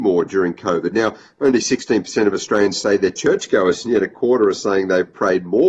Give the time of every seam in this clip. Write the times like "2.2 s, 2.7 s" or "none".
none